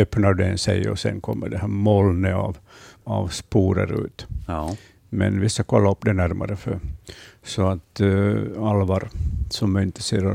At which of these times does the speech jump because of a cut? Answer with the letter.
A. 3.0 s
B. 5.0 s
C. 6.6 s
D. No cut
A